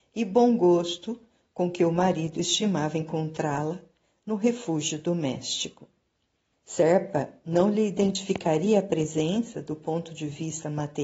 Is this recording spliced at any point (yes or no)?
yes